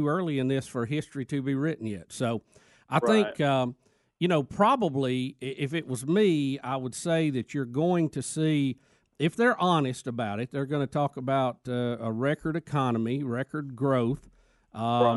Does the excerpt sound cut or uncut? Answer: uncut